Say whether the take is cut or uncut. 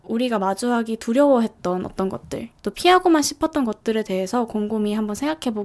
cut